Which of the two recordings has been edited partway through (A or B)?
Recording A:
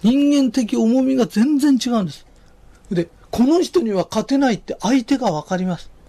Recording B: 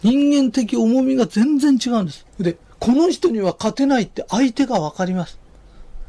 B